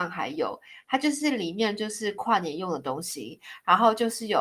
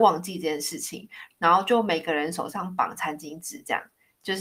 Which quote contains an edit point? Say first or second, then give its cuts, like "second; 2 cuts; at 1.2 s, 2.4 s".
second; 1 cut; at 1.3 s